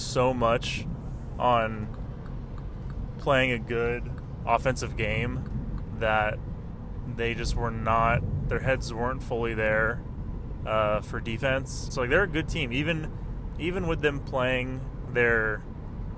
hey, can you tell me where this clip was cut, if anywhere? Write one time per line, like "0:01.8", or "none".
0:11.9